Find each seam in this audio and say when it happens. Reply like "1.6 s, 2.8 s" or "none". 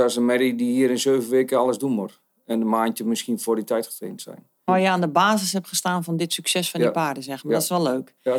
4.7 s